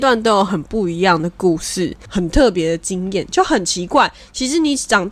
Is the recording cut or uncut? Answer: cut